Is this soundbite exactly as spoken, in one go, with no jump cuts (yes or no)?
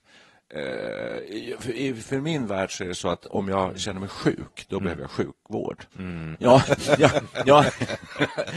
no